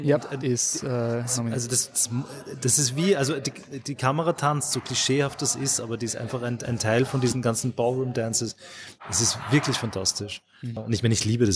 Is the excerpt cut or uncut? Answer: uncut